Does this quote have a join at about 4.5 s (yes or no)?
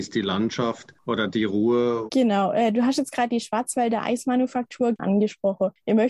no